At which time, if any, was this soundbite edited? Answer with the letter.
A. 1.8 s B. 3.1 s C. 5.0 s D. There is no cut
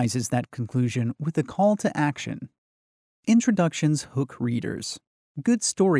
D